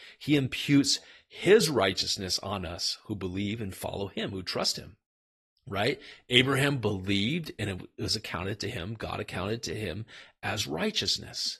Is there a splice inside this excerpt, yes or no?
no